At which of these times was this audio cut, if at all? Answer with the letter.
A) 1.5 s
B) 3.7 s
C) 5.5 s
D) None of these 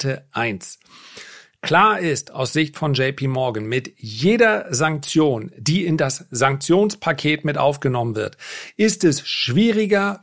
D